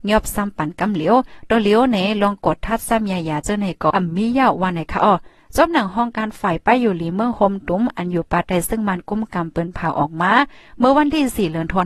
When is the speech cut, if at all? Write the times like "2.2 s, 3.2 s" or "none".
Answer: 3.9 s